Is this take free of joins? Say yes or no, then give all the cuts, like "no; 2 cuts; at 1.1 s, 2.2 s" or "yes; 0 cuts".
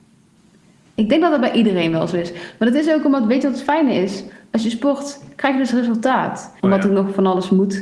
no; 1 cut; at 6.6 s